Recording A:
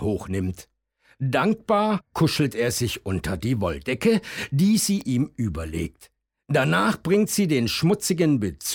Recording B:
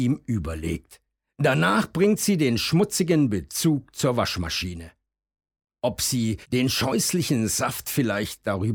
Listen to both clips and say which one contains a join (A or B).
B